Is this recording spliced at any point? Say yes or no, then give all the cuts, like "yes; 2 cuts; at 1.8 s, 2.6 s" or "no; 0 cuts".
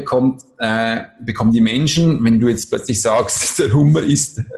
no; 0 cuts